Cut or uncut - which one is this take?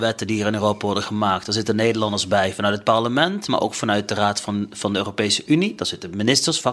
uncut